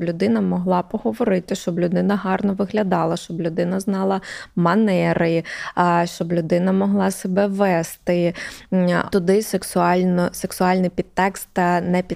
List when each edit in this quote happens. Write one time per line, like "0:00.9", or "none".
0:09.1